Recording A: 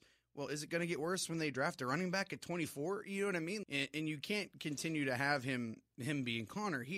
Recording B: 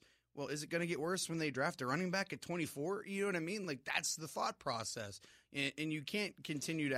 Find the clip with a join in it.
A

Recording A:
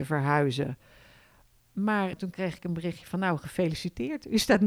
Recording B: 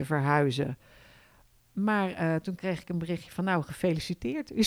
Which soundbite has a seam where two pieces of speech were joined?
A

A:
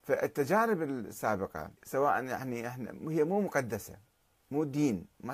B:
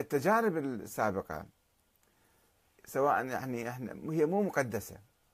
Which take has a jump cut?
A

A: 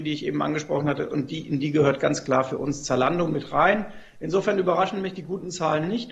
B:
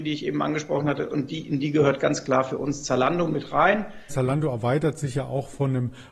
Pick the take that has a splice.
B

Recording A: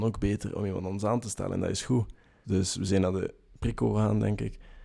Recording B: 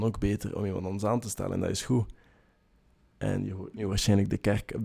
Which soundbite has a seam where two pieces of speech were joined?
A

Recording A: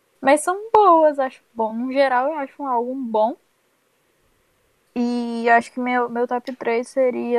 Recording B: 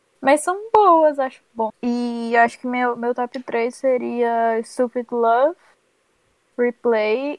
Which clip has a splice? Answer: B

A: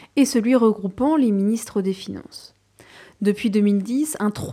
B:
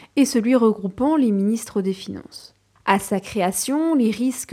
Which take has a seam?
B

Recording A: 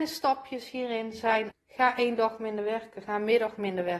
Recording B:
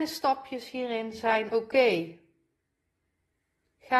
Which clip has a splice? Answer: A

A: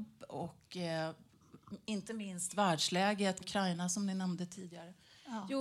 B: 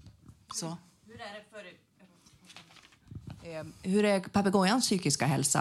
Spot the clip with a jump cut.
A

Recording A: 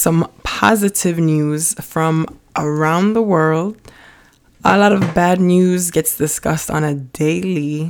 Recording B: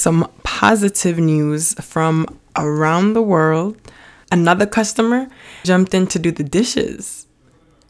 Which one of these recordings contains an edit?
B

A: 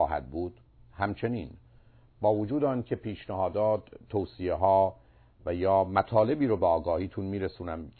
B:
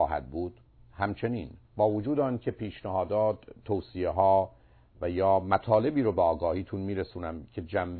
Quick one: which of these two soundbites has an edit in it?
B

